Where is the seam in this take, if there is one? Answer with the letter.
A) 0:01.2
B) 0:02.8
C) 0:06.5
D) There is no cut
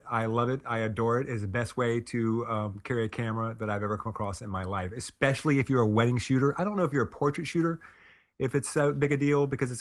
D